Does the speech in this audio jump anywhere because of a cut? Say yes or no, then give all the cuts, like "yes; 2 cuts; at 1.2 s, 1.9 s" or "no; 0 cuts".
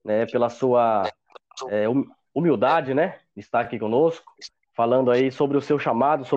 no; 0 cuts